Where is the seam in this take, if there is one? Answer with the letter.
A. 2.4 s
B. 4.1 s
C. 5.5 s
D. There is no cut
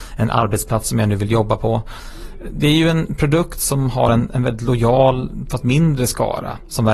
D